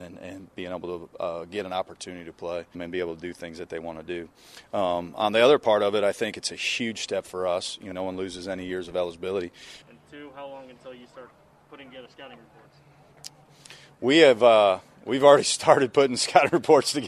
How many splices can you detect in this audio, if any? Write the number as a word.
three